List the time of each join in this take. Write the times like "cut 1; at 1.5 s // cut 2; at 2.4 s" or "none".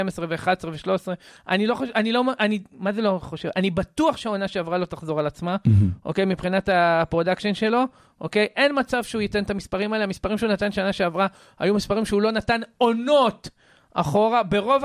none